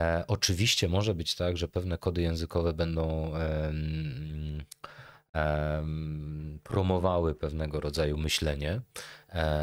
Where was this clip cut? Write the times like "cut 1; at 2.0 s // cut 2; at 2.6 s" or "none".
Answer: none